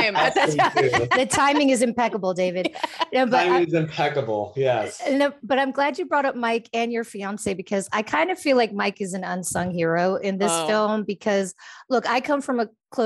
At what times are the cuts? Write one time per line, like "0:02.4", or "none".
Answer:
none